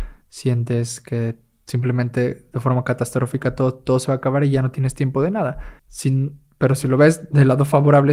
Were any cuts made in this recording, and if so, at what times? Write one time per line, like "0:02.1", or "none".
0:05.8